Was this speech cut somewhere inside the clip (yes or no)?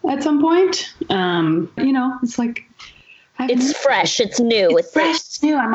yes